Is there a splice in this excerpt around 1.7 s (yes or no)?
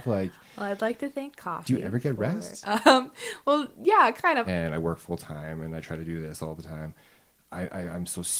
no